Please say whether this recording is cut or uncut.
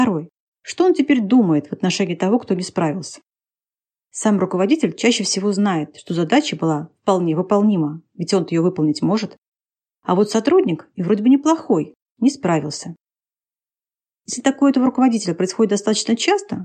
uncut